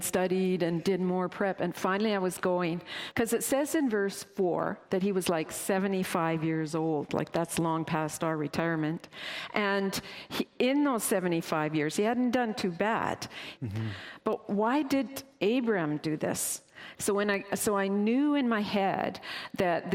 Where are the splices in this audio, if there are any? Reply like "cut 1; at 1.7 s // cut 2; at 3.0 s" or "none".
cut 1; at 3.1 s // cut 2; at 13.6 s // cut 3; at 17.0 s